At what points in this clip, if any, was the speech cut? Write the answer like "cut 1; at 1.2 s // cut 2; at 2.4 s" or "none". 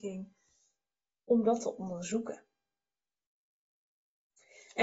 none